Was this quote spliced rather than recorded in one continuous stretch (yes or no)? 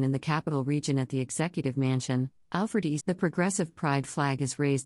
yes